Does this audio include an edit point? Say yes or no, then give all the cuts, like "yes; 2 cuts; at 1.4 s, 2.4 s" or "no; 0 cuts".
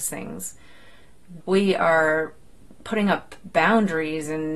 yes; 1 cut; at 1.4 s